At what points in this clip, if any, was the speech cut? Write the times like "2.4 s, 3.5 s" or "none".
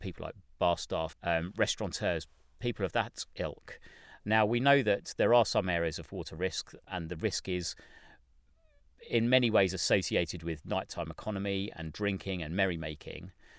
1.1 s, 4.2 s